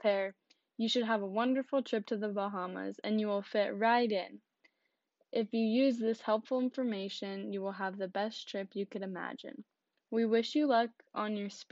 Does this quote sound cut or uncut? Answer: uncut